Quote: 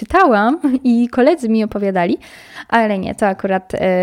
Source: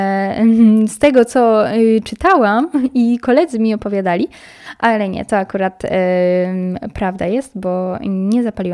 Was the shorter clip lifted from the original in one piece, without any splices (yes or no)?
yes